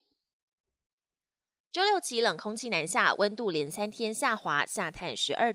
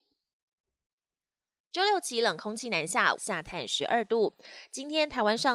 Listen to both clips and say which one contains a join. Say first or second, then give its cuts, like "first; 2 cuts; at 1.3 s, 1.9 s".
second; 1 cut; at 3.2 s